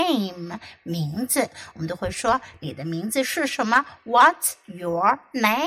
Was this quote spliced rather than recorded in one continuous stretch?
no; 0 cuts

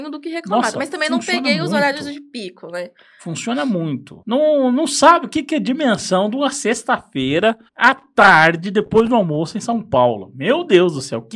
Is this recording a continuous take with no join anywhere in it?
no; 2 cuts; at 4.2 s, 7.7 s

